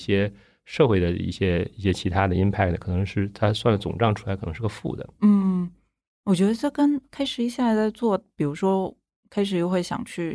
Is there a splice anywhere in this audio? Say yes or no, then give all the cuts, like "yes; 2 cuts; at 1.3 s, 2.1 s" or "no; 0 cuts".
no; 0 cuts